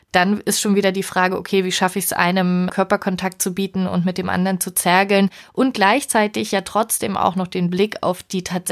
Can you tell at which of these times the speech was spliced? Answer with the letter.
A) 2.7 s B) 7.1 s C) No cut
A